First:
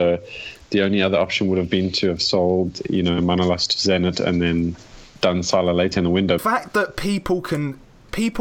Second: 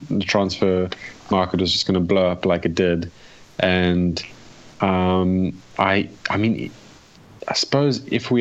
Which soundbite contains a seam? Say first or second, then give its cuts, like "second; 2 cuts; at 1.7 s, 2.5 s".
first; 2 cuts; at 5.2 s, 6.4 s